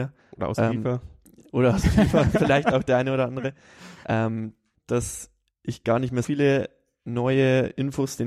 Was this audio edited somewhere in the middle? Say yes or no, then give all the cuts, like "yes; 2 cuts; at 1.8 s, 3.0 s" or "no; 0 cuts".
yes; 2 cuts; at 4.7 s, 6.2 s